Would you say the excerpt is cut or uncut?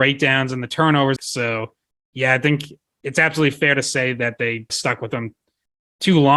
cut